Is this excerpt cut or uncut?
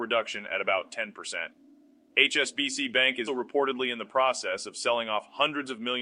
cut